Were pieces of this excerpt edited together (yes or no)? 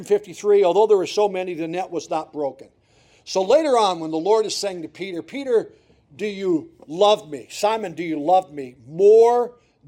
no